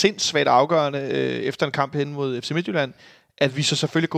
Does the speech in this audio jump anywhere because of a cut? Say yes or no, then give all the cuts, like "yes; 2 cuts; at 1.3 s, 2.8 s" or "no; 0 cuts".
no; 0 cuts